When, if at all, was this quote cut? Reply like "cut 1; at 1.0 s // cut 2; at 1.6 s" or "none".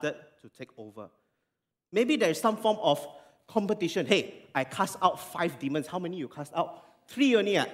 none